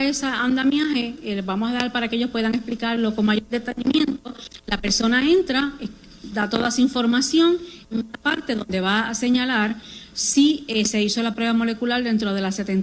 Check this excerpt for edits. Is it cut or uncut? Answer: cut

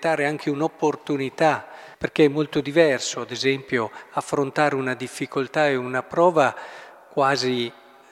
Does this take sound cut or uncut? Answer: cut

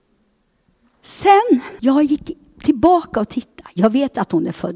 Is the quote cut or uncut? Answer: cut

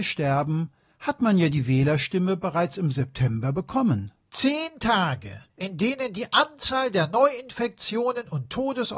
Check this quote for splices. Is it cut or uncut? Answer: cut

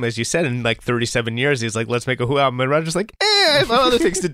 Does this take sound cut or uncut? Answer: uncut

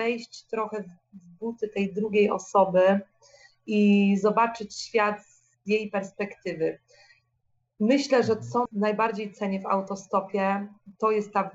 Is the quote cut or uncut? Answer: cut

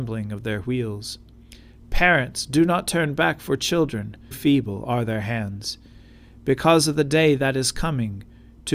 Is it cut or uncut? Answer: cut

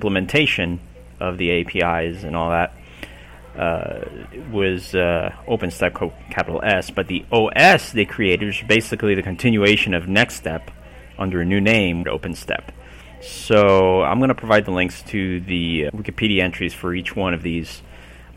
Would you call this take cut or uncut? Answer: cut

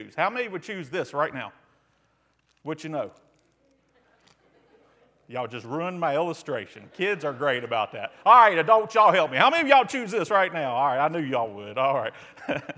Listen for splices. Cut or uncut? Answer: uncut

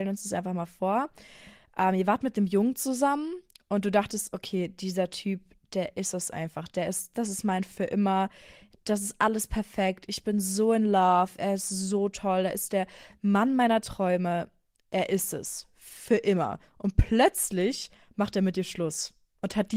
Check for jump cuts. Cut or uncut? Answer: uncut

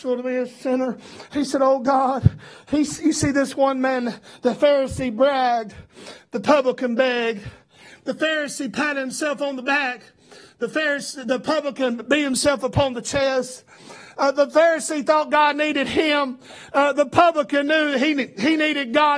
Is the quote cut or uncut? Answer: uncut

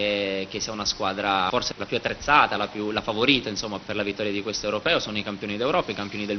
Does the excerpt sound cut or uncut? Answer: uncut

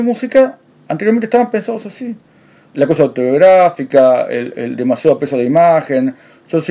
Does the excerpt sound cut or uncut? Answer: cut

